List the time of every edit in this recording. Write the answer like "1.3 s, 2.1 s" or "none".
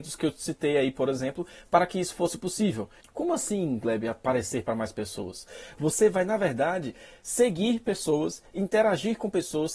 3.0 s

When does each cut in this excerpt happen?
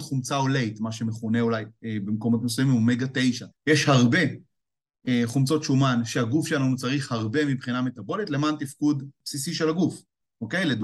3.5 s

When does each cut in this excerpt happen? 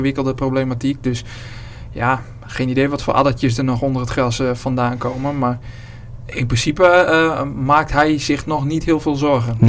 none

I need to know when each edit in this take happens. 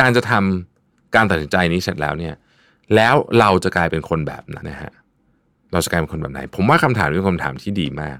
4.6 s

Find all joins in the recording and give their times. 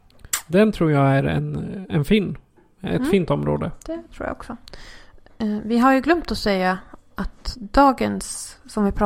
none

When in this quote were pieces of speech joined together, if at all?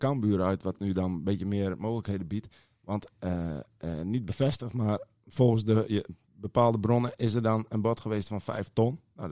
none

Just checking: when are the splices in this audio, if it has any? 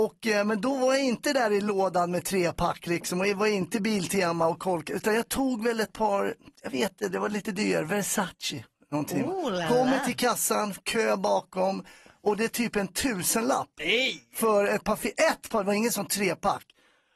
none

